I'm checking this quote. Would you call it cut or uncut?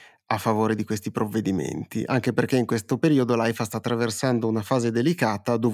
uncut